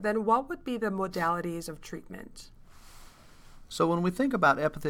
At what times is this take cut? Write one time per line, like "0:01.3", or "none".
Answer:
none